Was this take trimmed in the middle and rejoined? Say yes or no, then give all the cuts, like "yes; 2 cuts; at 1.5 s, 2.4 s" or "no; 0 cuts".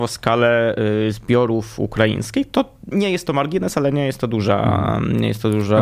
yes; 1 cut; at 2.9 s